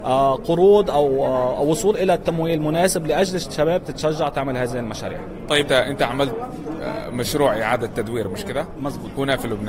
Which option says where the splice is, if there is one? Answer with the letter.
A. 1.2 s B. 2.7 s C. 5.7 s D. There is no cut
C